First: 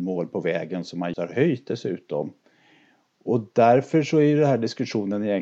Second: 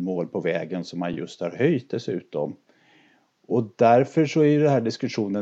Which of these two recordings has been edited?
first; 1 cut; at 1.1 s

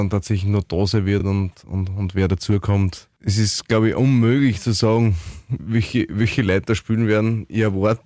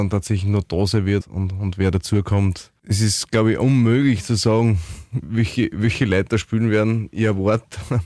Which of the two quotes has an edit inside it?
second; 1 cut; at 1.2 s

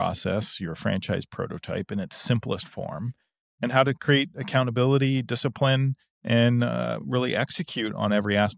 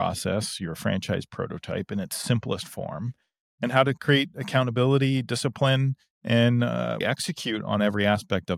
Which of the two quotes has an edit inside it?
second; 1 cut; at 7.0 s

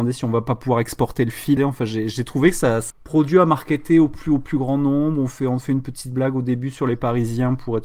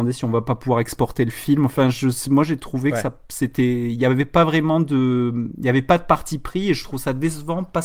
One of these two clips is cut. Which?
first; 2 cuts; at 1.6 s, 2.9 s

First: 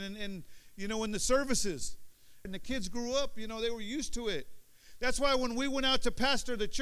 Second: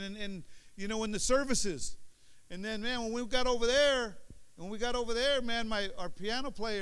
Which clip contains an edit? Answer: first; 1 cut; at 2.4 s

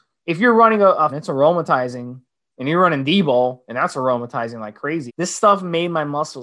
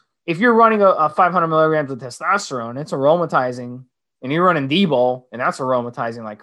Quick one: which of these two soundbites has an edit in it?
first; 2 cuts; at 1.1 s, 5.1 s

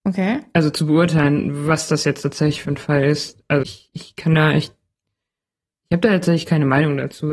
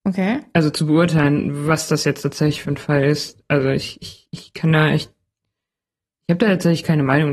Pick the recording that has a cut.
first; 1 cut; at 3.6 s

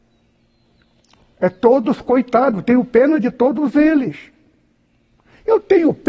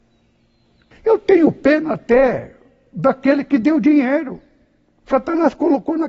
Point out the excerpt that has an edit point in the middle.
second; 1 cut; at 0.9 s

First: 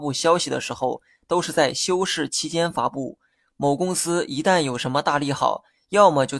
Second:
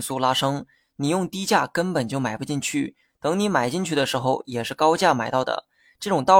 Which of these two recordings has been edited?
first; 1 cut; at 3.5 s

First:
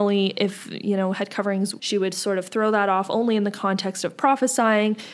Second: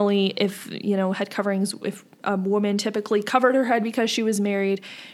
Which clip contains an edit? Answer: first; 1 cut; at 1.8 s

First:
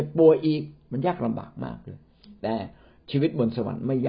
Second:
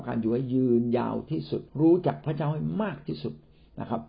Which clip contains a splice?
second; 1 cut; at 1.7 s

